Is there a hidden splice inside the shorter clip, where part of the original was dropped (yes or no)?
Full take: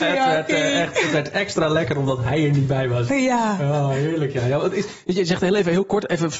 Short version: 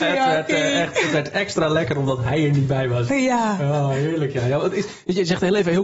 no